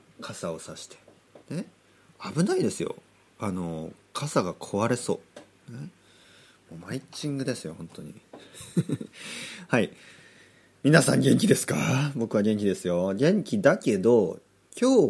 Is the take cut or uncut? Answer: cut